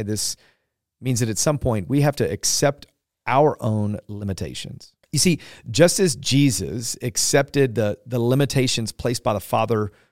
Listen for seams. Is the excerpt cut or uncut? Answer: cut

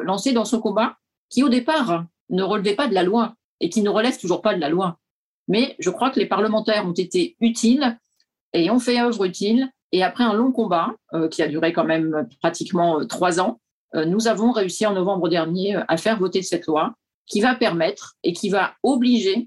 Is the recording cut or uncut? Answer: uncut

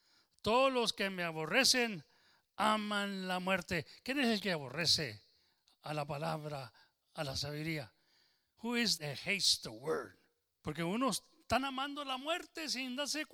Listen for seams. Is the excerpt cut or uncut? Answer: cut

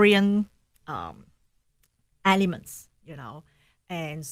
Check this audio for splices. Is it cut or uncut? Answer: uncut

